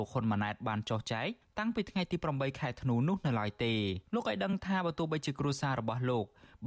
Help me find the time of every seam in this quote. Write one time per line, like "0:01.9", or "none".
0:04.1